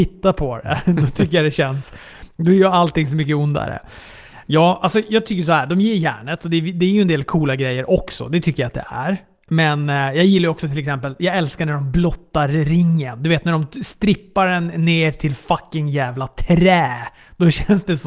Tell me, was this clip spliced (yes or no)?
yes